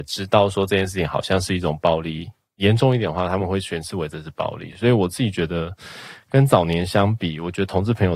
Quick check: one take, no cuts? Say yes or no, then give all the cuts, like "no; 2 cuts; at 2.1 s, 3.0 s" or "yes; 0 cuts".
yes; 0 cuts